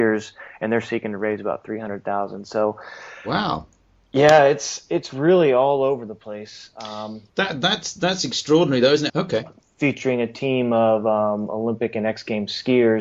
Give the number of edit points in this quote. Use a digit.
2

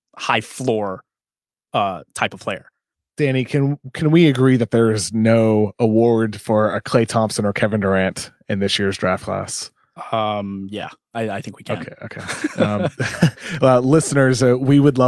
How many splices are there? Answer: 0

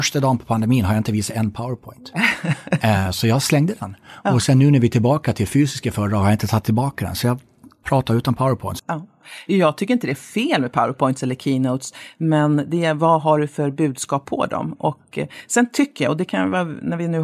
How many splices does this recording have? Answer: 1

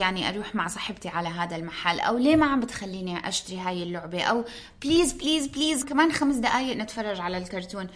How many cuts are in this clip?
1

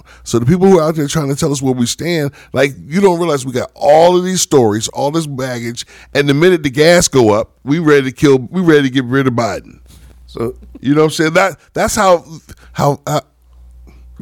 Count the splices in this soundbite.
1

